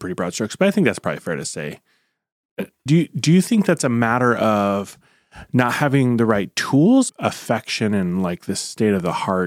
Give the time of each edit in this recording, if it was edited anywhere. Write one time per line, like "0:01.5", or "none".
0:02.9
0:07.1